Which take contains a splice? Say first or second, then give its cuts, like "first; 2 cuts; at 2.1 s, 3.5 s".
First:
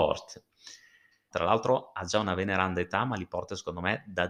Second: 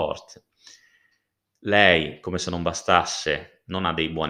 first; 1 cut; at 1.3 s